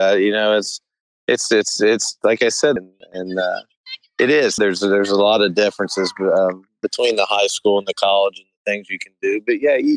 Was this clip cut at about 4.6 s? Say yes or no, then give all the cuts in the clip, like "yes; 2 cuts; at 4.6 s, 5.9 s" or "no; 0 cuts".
yes; 2 cuts; at 2.8 s, 4.6 s